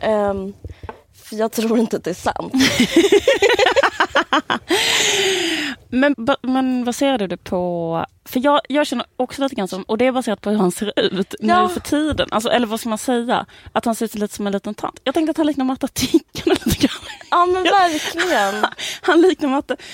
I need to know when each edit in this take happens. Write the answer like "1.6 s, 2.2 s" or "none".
6.1 s

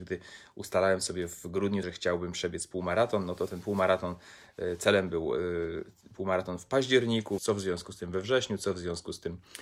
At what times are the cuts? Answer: 1.8 s, 7.4 s

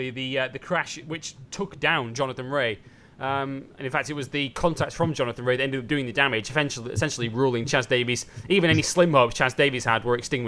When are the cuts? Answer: none

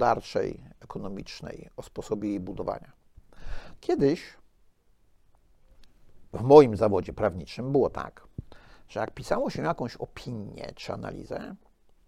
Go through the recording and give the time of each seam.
3.8 s

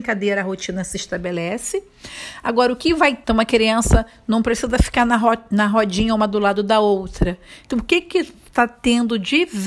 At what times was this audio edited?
3.2 s, 7.6 s

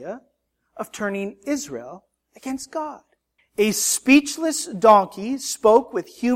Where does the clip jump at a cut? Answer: 3.4 s

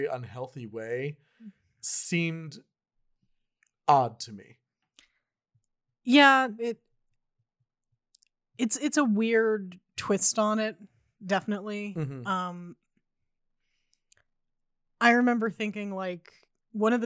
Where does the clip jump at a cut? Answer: 6.6 s

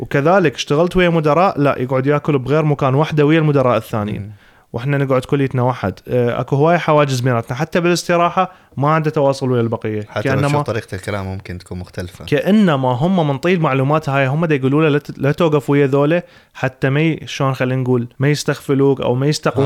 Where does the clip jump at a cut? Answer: 18.1 s

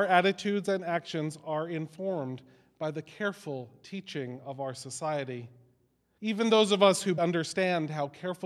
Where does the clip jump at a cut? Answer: 6.2 s, 7.2 s

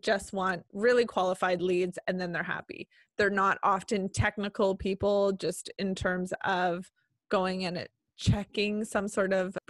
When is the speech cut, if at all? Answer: none

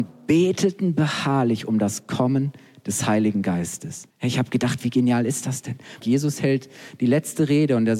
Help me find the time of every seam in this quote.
4.1 s, 6.0 s

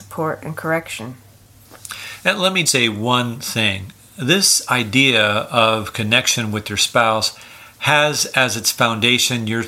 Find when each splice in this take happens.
2.7 s

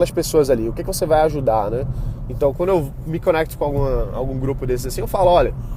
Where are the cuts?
none

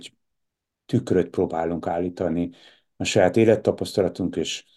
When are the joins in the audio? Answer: none

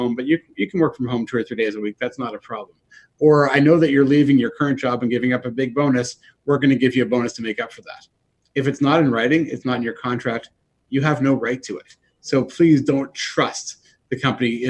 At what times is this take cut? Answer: none

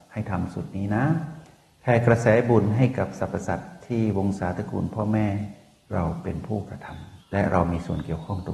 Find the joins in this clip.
7.2 s

